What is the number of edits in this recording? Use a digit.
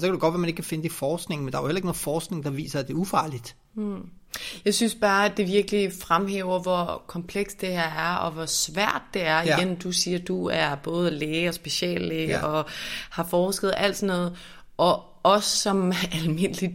0